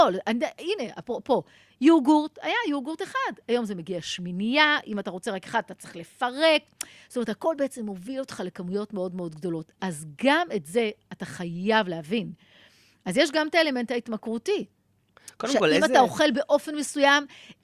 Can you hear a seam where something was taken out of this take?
no; 0 cuts

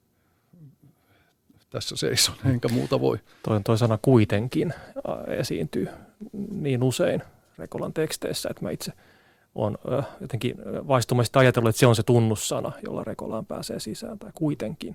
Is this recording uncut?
yes; 0 cuts

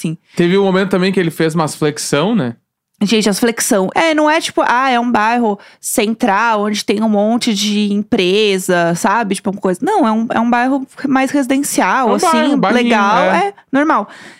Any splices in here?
yes; 1 cut; at 3.9 s

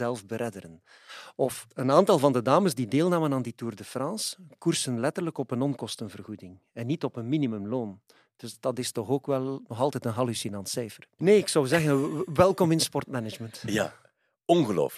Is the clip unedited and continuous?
no; 1 cut; at 11.2 s

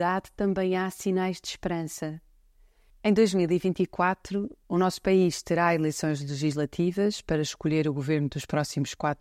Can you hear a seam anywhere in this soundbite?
yes; 2 cuts; at 2.9 s, 4.6 s

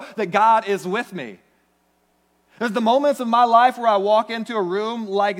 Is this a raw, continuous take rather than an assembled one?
yes; 0 cuts

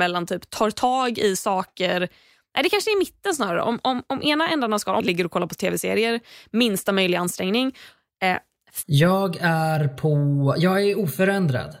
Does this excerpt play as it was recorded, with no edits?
no; 2 cuts; at 5.0 s, 8.8 s

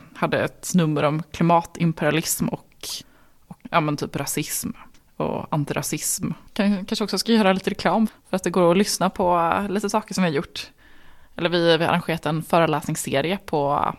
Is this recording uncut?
no; 2 cuts; at 6.5 s, 8.1 s

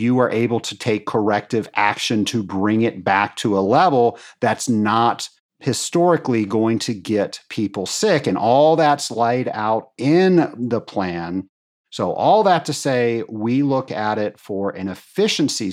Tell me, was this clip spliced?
no; 0 cuts

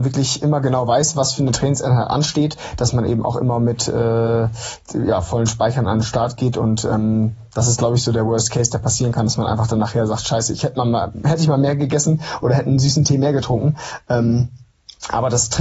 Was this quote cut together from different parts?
no; 0 cuts

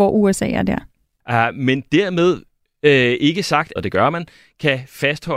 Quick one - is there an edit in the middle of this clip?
yes; 2 cuts; at 1.2 s, 3.8 s

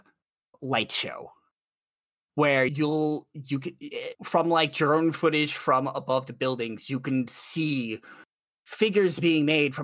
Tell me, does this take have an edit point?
yes; 1 cut; at 4.1 s

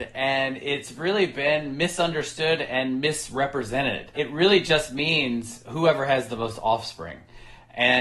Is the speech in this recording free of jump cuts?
yes; 0 cuts

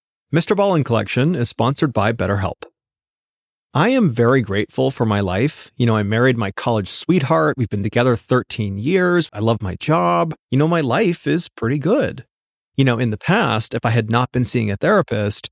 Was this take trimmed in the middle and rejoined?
yes; 2 cuts; at 9.3 s, 12.6 s

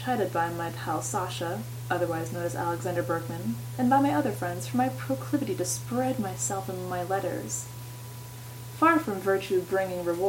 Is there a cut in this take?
no; 0 cuts

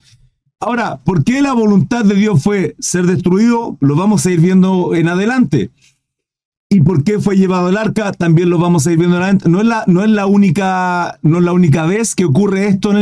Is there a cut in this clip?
no; 0 cuts

